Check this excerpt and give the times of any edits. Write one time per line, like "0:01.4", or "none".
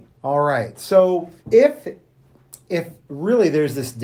0:01.4